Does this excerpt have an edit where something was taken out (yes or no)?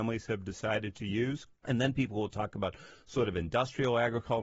yes